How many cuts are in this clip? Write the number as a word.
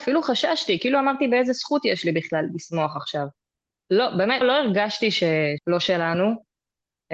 two